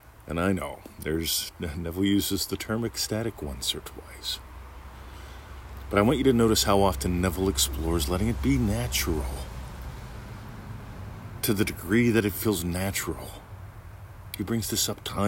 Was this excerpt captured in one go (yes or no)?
yes